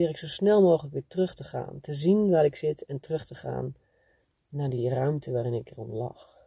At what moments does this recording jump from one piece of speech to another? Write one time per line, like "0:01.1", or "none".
none

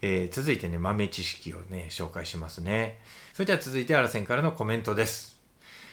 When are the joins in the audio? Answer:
0:03.3

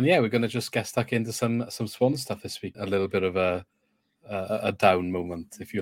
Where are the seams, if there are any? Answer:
0:02.7

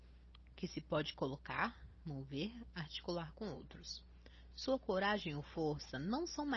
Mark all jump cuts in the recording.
none

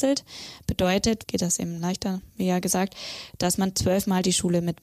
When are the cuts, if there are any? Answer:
0:01.2

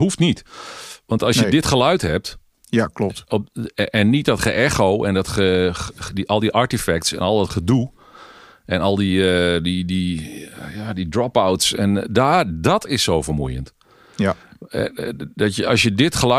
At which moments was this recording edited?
none

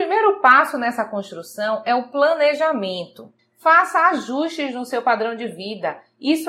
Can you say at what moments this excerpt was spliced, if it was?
0:03.4

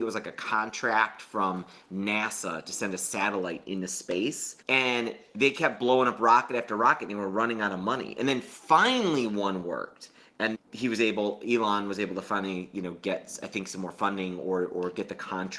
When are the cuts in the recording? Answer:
0:04.6
0:10.5

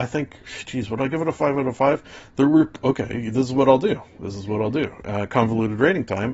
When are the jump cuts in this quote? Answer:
none

